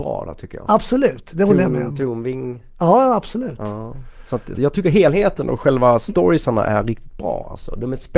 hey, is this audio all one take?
no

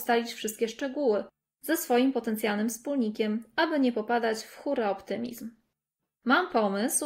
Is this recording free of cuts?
no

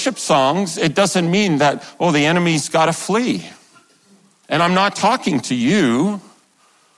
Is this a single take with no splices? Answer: no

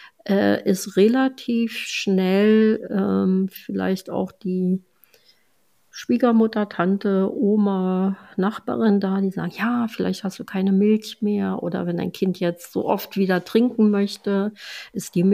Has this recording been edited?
yes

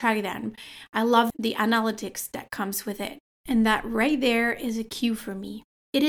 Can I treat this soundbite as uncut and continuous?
yes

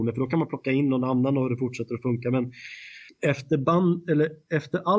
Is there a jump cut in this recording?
yes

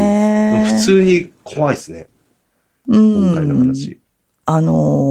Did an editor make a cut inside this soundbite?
no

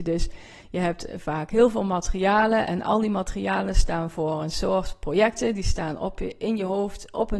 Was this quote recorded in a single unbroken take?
yes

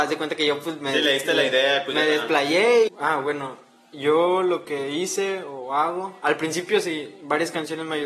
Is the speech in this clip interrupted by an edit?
yes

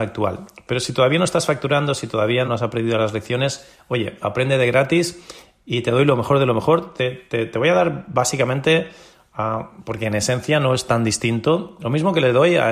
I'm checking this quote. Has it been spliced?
yes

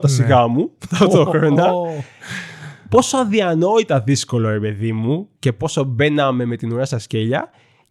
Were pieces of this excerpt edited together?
no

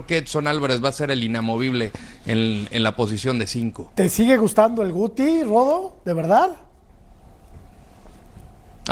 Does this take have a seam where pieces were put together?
no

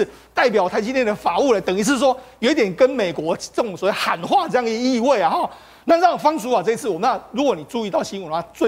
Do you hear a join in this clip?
no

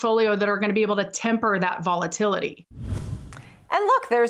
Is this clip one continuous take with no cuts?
no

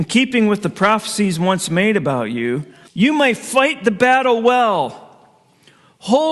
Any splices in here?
yes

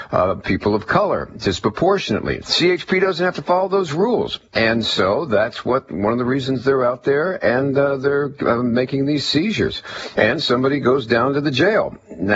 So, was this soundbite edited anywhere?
yes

